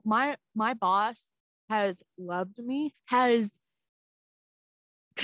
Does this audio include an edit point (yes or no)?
yes